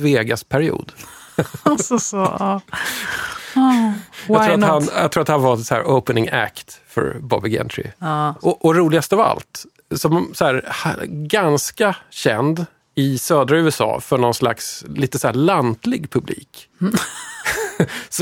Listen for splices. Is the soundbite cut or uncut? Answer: uncut